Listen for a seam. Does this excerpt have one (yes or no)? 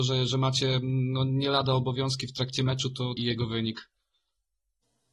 yes